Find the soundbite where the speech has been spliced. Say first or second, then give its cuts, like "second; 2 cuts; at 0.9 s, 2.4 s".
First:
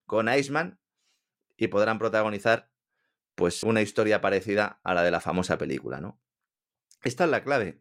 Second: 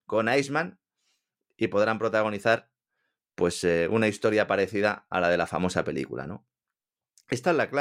first; 1 cut; at 3.6 s